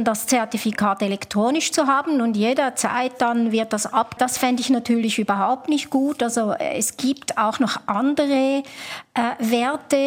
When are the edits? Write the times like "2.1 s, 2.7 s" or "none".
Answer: 4.2 s